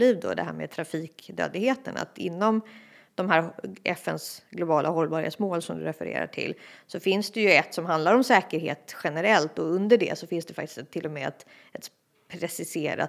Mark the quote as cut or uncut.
uncut